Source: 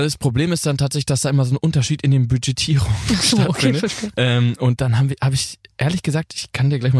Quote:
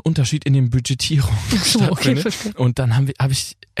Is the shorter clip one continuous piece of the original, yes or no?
no